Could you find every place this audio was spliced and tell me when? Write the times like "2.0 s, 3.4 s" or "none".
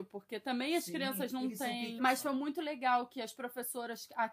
2.0 s